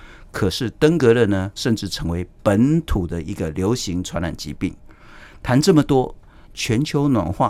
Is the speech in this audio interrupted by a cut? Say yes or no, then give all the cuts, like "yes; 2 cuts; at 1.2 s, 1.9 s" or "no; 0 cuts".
yes; 2 cuts; at 1.6 s, 6.5 s